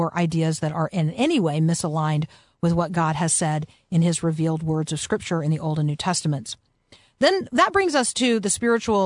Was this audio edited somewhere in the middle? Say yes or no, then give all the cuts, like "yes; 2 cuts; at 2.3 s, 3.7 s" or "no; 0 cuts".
no; 0 cuts